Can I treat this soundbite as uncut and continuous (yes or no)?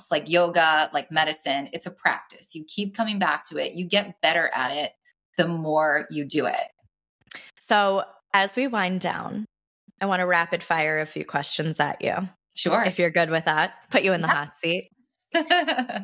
yes